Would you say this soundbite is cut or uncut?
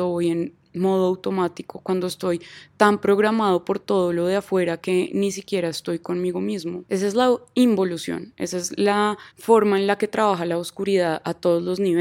uncut